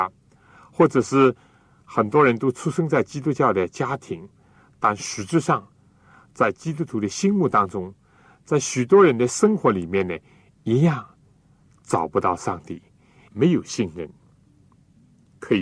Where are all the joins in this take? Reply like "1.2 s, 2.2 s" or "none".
13.3 s